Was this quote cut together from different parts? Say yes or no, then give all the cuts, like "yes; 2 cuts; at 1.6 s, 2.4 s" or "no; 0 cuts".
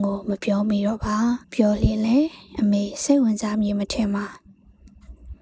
yes; 1 cut; at 1.4 s